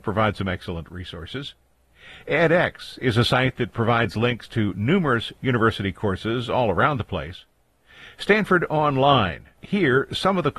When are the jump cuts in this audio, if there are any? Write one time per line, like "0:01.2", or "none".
0:09.5